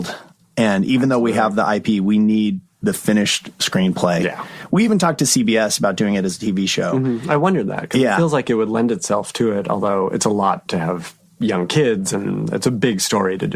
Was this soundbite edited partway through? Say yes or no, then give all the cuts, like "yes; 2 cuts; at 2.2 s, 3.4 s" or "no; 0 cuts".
no; 0 cuts